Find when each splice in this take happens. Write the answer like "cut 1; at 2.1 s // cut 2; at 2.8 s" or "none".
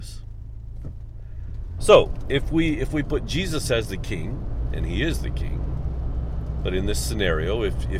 cut 1; at 1.8 s

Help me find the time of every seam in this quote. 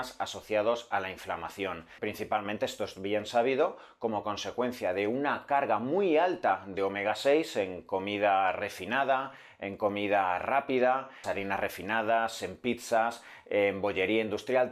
cut 1; at 2.0 s // cut 2; at 11.2 s

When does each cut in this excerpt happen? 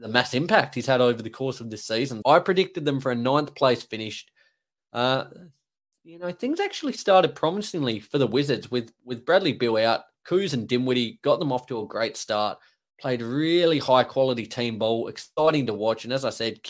cut 1; at 2.2 s // cut 2; at 4.8 s

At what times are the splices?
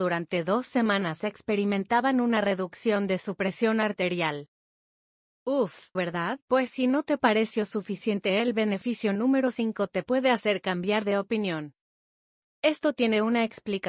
cut 1; at 6.0 s // cut 2; at 12.4 s

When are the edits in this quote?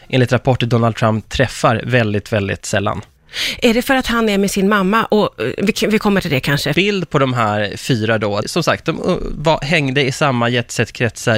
cut 1; at 6.7 s // cut 2; at 8.4 s

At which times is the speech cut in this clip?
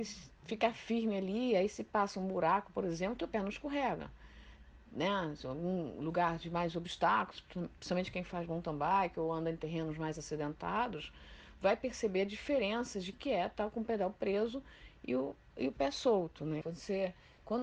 cut 1; at 13.1 s // cut 2; at 16.6 s

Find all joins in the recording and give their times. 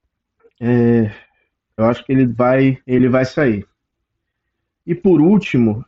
cut 1; at 1.8 s // cut 2; at 2.8 s

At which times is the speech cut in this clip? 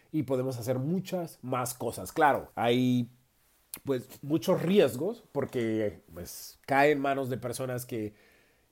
cut 1; at 2.5 s

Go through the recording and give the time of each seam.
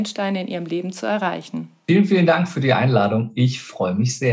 cut 1; at 1.8 s

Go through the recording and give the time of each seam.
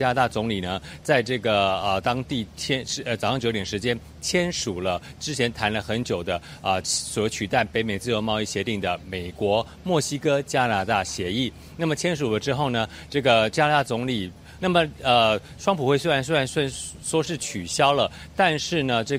cut 1; at 14.6 s

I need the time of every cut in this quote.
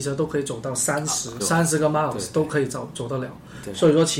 cut 1; at 1.4 s

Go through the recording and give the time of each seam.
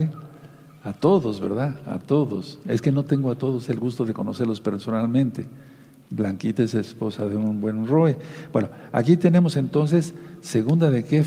none

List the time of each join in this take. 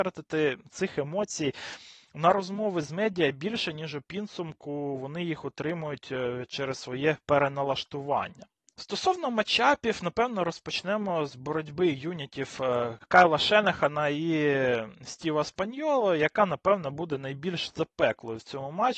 none

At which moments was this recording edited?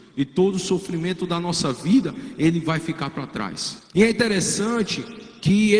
cut 1; at 3.9 s

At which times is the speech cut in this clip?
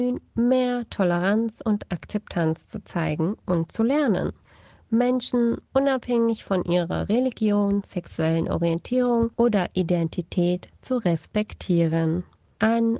cut 1; at 9.3 s

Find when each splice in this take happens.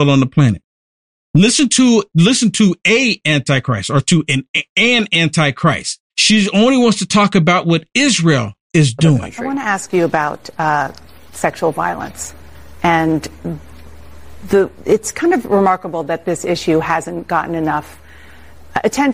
cut 1; at 6.1 s // cut 2; at 14.7 s

